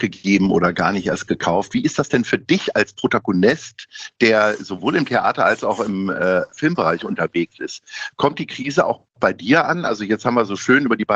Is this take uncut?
yes; 0 cuts

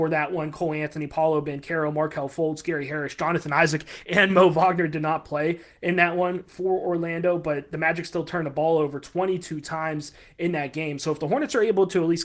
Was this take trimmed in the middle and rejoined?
no; 0 cuts

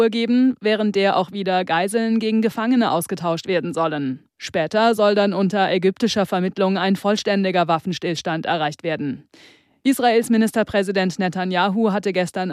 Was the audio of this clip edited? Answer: no; 0 cuts

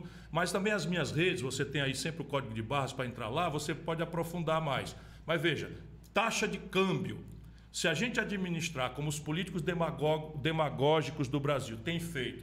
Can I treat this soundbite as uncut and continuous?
yes; 0 cuts

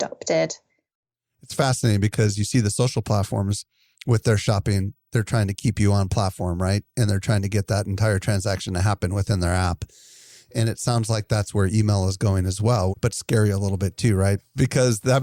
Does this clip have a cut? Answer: yes; 1 cut; at 12.9 s

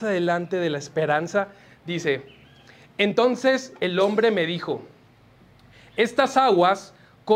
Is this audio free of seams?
yes; 0 cuts

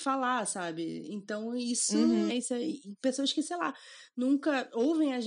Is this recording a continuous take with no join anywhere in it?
no; 1 cut; at 2.3 s

